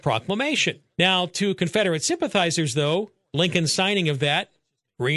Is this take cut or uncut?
cut